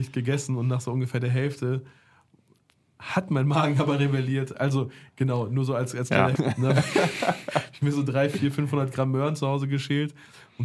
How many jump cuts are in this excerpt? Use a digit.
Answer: 1